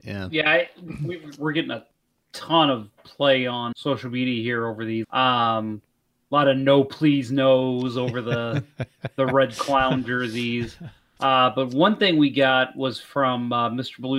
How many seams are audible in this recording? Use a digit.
2